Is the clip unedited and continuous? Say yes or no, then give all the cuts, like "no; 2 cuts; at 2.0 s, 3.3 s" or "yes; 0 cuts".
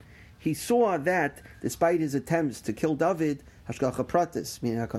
yes; 0 cuts